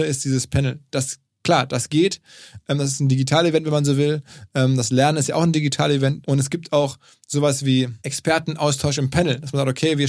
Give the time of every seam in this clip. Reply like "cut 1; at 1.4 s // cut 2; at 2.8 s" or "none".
cut 1; at 6.2 s // cut 2; at 8.0 s